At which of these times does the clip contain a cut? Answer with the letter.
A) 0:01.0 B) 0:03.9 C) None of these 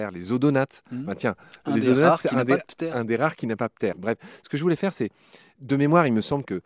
B